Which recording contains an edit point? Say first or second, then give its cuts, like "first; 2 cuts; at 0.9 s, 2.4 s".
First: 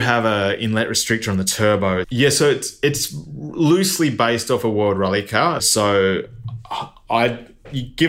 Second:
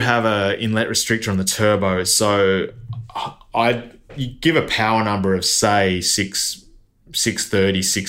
first; 2 cuts; at 2.0 s, 5.6 s